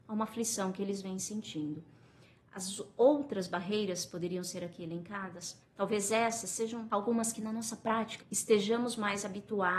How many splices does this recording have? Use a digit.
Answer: 2